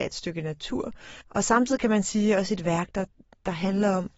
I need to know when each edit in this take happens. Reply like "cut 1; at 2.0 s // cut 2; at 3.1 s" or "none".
cut 1; at 1.2 s